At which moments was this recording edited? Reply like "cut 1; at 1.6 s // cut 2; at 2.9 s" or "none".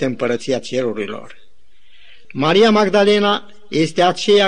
cut 1; at 2.2 s